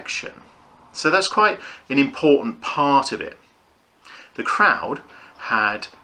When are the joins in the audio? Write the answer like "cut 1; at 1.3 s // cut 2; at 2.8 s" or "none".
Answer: cut 1; at 4.3 s